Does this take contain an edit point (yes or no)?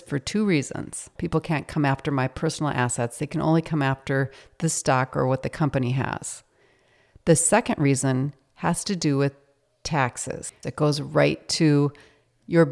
yes